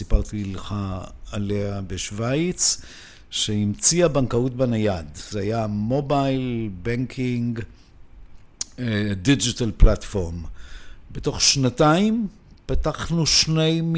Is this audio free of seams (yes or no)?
yes